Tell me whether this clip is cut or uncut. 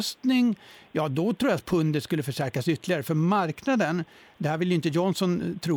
uncut